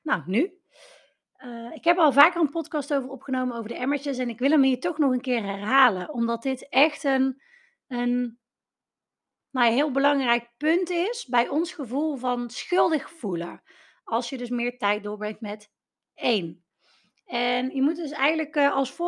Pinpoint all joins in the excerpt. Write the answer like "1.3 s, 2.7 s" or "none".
none